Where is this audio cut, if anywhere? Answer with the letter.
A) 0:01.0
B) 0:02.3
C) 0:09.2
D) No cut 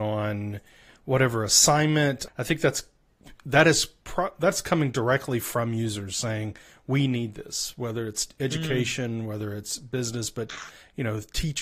B